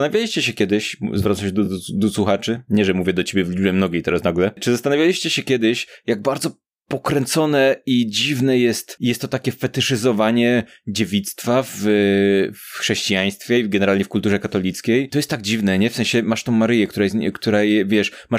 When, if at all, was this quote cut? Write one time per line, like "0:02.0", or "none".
none